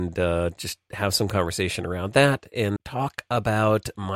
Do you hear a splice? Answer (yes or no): yes